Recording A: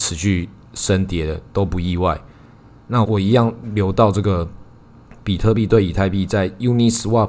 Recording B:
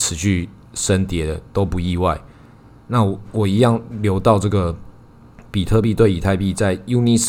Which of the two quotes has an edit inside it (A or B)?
A